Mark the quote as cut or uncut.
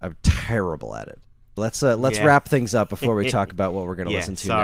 cut